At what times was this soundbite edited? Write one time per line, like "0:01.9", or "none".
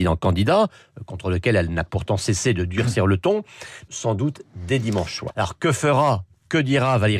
0:03.9
0:05.3